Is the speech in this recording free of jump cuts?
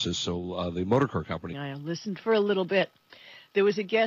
no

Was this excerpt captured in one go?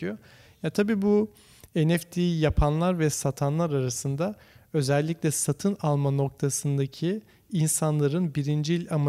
yes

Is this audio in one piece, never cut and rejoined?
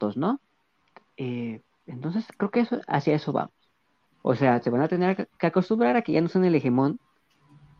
no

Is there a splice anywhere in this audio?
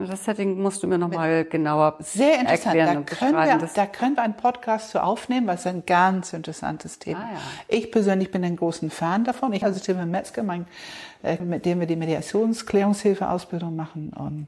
yes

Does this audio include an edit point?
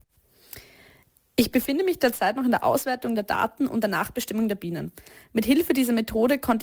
yes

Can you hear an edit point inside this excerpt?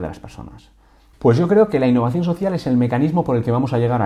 yes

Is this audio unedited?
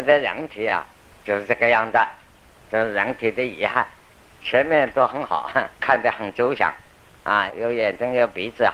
no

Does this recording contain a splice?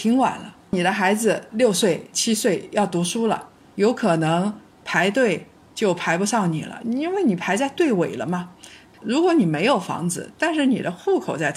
yes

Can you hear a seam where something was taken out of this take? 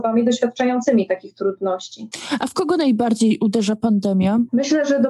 no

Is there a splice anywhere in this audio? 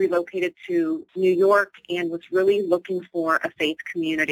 yes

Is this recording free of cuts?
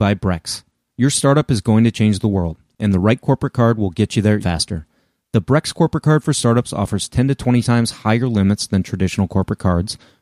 no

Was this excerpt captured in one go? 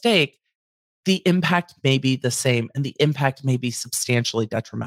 yes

